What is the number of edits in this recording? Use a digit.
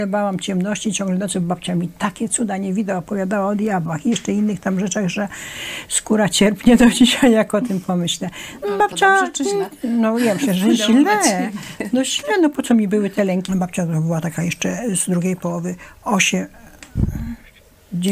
2